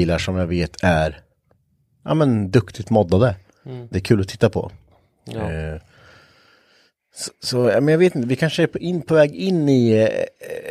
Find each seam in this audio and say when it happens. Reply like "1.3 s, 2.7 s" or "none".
3.9 s